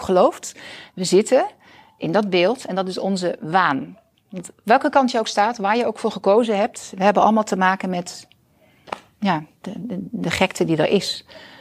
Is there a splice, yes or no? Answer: yes